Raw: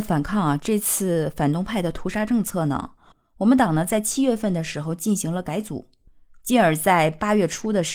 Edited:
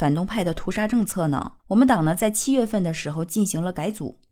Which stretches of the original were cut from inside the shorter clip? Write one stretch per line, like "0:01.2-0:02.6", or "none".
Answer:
0:03.0-0:03.3